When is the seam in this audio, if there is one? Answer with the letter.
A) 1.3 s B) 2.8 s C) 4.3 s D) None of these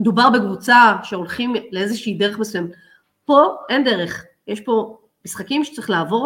D